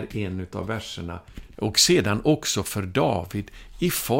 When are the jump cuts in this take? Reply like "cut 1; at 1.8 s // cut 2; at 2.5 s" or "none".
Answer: cut 1; at 1.5 s